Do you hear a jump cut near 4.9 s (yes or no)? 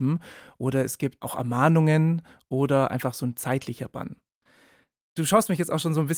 no